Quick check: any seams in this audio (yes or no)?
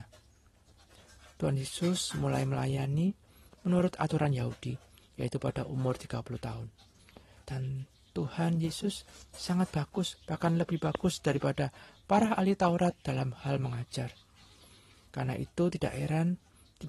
yes